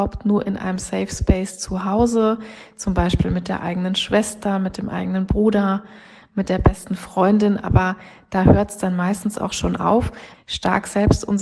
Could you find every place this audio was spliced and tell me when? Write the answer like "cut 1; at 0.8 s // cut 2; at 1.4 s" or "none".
cut 1; at 10.3 s